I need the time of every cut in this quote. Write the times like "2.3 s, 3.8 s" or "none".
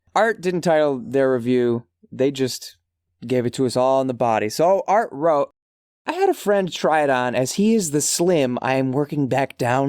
2.0 s